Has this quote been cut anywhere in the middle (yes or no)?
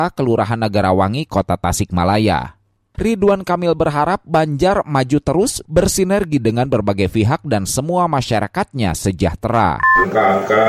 yes